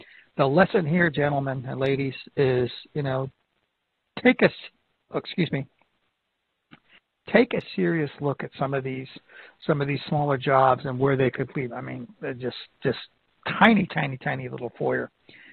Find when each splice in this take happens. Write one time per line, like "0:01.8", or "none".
0:11.7